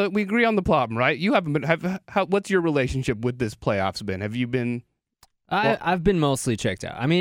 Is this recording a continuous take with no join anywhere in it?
yes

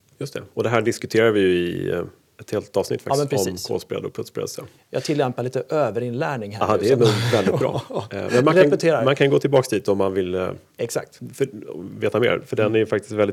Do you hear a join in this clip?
no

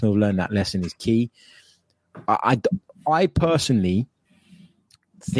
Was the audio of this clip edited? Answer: no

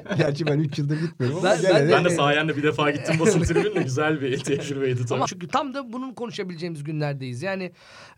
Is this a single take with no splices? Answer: no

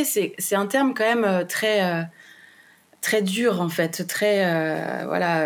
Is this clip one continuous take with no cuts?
yes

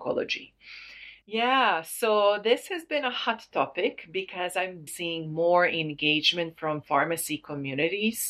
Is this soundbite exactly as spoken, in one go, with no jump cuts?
no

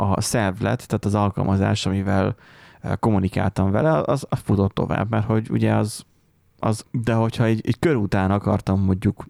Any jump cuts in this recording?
yes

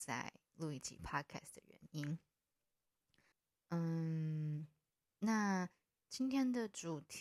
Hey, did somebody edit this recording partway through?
no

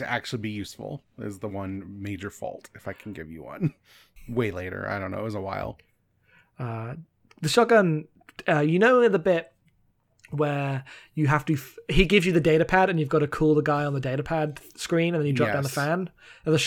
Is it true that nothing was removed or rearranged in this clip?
no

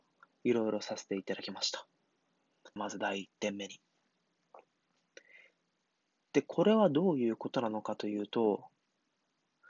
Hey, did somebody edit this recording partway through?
yes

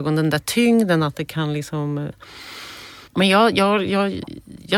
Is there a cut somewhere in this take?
yes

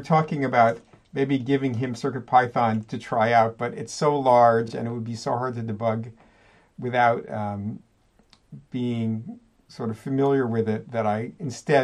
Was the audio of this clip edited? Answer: no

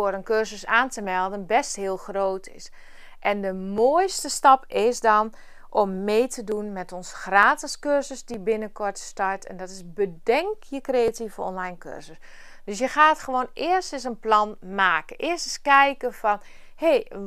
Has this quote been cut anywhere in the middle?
no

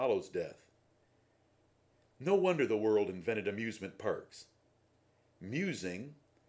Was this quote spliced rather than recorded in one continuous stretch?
no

